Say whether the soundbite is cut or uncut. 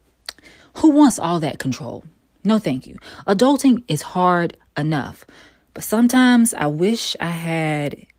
uncut